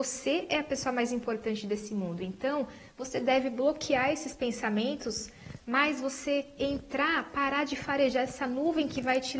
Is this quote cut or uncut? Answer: cut